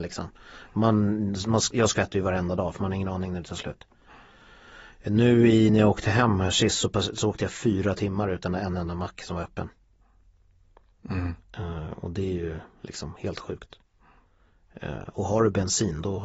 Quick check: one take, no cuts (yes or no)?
yes